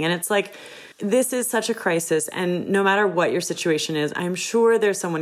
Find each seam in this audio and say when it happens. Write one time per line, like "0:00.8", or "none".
0:00.9